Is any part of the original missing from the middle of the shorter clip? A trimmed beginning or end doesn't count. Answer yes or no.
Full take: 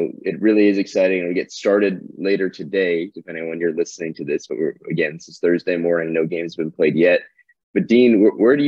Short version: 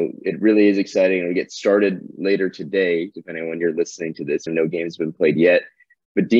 yes